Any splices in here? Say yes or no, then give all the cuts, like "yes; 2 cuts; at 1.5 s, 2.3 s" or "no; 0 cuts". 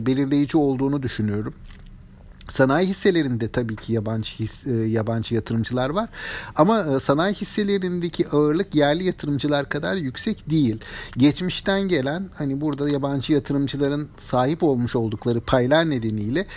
no; 0 cuts